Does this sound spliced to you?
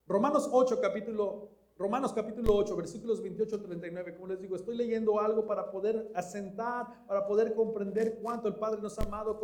no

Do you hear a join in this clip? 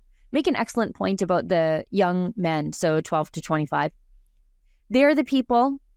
no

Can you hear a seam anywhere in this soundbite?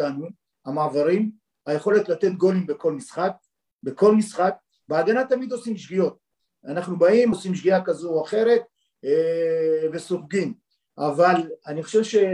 no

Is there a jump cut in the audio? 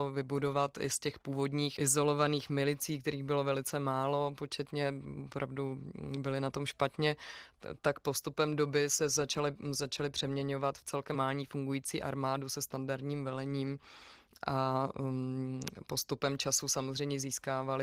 yes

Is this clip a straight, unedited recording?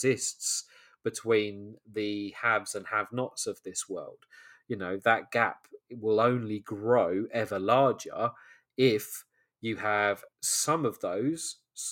no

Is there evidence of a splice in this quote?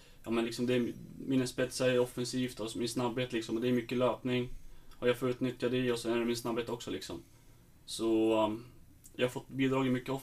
no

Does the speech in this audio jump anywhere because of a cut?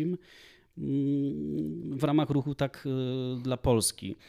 no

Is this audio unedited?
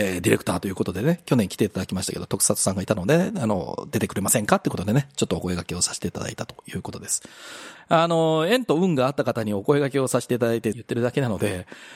no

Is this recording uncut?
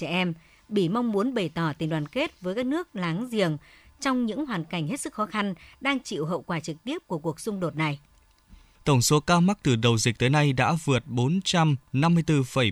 no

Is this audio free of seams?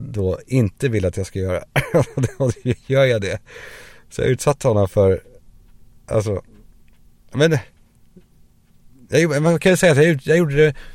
yes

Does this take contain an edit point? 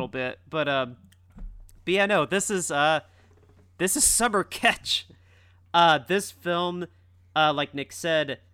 no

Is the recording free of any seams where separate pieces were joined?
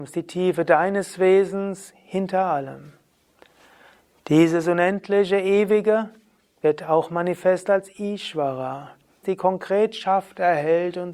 no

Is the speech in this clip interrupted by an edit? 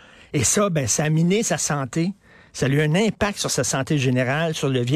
no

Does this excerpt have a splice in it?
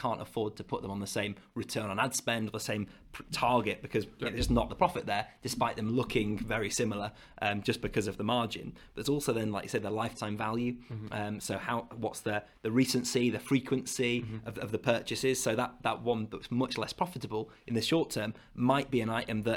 no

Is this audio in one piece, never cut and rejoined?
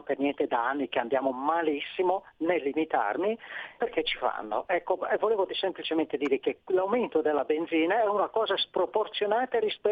no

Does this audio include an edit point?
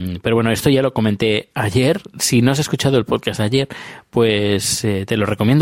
no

